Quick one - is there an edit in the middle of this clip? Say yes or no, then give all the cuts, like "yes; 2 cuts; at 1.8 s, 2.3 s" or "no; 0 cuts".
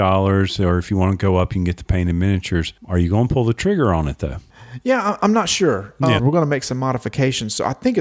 yes; 2 cuts; at 2.8 s, 6.2 s